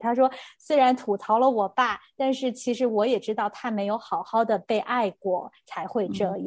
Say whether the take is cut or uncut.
uncut